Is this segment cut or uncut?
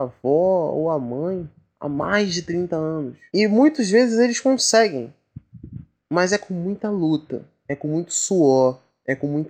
cut